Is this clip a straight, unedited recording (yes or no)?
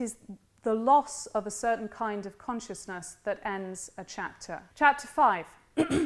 no